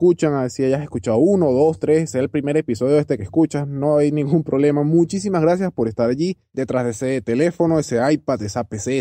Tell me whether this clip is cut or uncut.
uncut